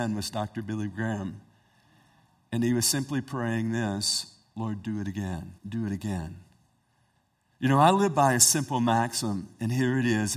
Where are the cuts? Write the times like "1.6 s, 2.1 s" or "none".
5.6 s